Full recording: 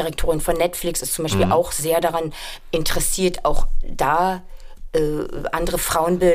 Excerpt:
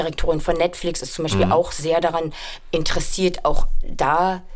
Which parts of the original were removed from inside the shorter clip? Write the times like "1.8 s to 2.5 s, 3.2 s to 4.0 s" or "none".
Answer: none